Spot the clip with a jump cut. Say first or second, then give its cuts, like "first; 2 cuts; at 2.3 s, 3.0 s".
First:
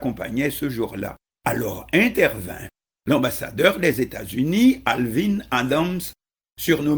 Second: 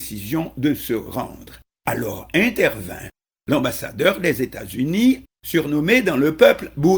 second; 2 cuts; at 1.7 s, 5.2 s